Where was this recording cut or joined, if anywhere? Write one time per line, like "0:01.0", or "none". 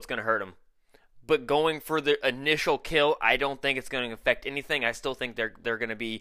none